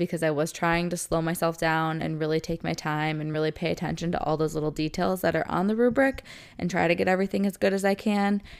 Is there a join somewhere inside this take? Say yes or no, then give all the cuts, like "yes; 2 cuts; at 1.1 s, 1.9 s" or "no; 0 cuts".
no; 0 cuts